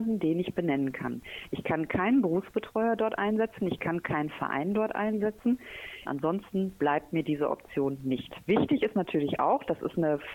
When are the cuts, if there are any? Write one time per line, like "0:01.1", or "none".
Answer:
0:06.1
0:08.4